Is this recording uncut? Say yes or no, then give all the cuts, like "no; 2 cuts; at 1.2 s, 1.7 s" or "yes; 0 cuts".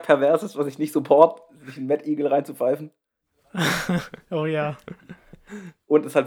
yes; 0 cuts